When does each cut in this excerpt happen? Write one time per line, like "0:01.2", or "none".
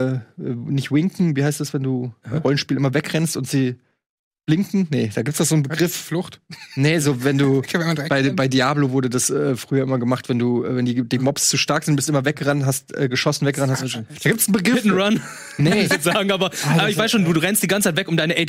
none